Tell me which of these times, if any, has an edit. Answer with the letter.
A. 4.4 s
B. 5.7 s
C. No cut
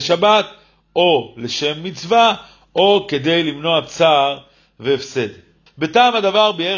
B